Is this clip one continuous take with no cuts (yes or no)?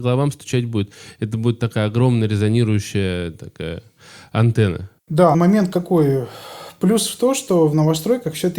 no